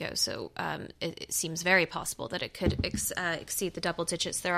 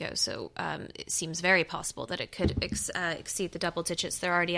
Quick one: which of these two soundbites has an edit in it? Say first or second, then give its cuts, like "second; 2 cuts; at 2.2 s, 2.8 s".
second; 1 cut; at 0.9 s